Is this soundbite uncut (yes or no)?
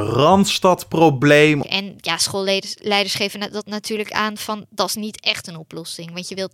no